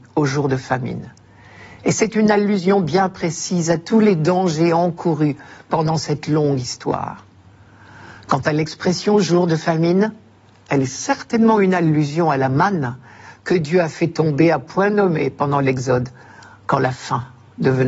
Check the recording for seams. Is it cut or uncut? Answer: uncut